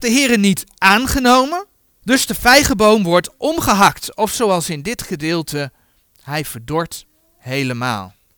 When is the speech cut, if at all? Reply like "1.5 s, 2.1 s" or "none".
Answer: 2.0 s